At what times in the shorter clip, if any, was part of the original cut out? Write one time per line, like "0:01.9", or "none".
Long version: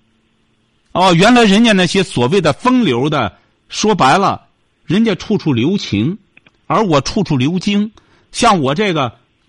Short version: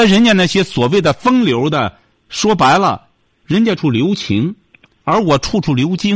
0:03.8